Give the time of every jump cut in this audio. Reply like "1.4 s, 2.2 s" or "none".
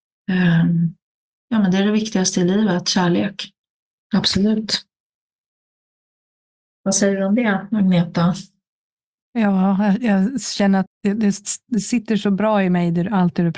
3.9 s, 10.9 s